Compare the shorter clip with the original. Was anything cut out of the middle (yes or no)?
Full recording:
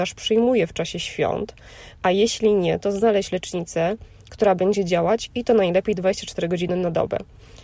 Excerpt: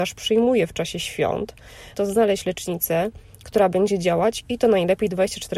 yes